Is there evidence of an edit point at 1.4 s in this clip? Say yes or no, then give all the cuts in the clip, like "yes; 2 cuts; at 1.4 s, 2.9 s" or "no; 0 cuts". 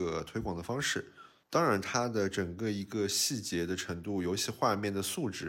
yes; 1 cut; at 1.4 s